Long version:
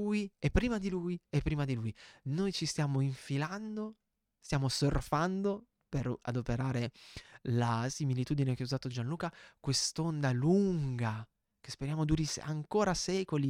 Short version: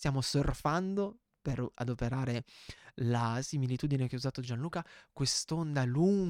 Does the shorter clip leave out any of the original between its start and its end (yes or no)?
no